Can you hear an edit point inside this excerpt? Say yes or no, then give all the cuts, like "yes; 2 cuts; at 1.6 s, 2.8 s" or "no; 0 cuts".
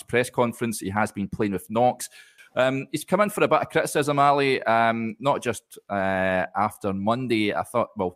yes; 1 cut; at 2.4 s